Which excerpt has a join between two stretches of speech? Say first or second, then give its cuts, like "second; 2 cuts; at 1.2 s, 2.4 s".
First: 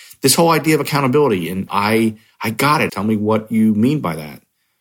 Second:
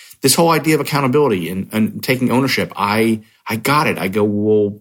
first; 2 cuts; at 1.7 s, 2.9 s